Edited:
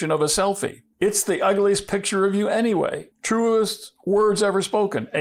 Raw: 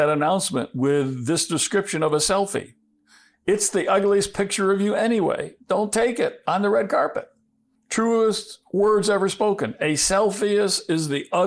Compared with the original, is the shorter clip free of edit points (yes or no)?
no